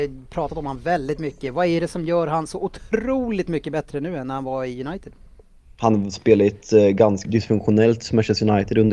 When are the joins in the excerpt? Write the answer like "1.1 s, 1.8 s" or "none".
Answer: 7.2 s

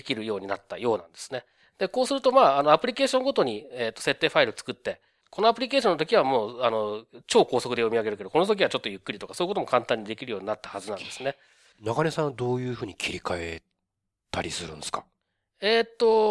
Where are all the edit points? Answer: 11.7 s

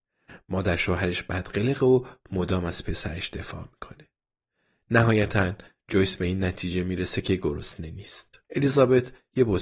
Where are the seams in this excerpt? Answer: 8.4 s

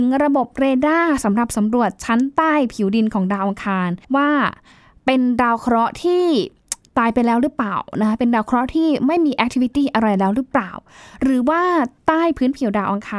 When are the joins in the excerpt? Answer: 4.0 s

